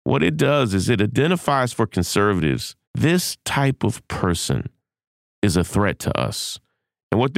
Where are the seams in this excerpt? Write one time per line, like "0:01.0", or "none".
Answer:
0:02.8